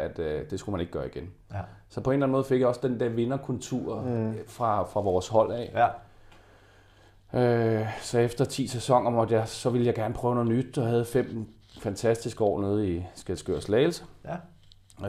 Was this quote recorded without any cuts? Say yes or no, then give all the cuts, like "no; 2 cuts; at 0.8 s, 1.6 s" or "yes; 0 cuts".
yes; 0 cuts